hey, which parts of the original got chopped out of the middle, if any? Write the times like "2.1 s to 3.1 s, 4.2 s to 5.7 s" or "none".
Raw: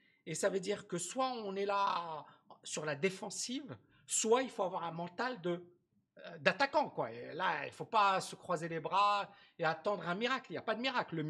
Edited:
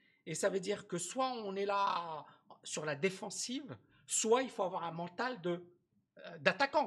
none